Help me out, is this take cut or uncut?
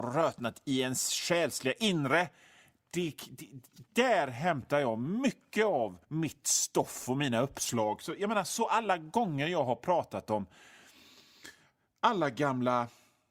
cut